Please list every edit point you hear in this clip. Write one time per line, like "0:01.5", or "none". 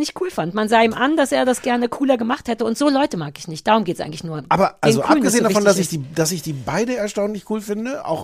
none